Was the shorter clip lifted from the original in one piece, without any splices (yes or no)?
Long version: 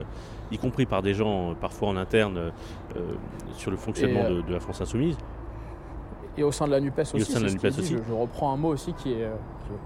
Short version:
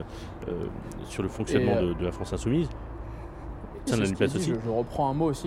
no